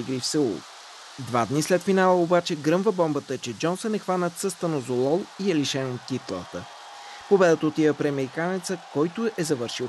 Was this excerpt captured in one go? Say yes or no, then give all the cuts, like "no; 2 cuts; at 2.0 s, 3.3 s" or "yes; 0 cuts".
yes; 0 cuts